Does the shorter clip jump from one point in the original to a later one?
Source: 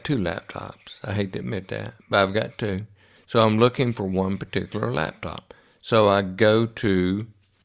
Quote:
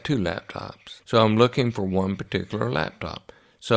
yes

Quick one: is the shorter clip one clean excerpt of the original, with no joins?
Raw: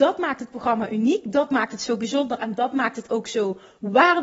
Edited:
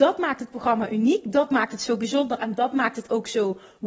yes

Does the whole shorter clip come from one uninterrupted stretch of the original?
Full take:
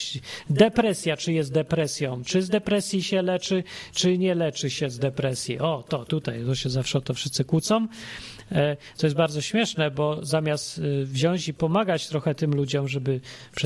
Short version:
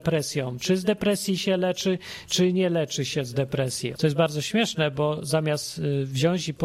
no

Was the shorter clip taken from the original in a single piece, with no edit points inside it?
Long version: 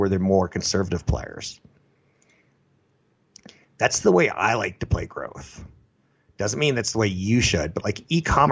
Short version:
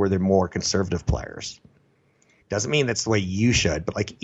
no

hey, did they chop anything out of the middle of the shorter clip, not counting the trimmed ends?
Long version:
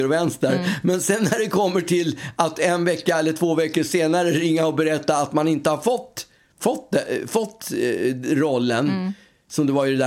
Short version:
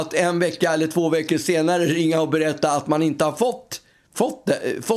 no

